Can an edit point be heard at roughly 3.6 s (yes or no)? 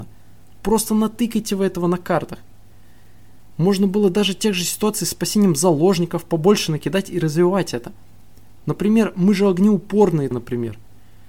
no